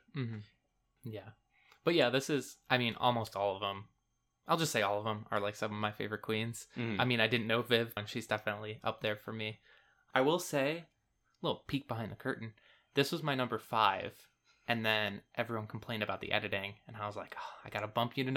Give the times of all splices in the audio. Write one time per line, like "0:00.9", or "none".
0:01.0
0:08.0